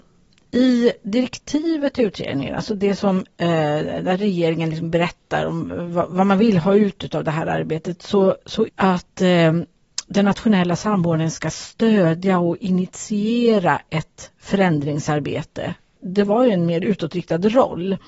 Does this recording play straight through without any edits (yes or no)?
no